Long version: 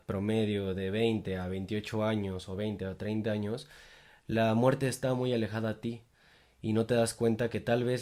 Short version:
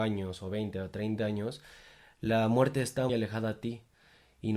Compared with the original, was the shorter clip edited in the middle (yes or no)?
yes